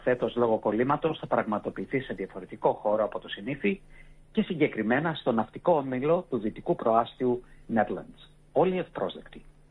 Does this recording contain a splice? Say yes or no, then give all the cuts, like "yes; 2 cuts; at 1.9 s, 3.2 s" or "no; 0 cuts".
no; 0 cuts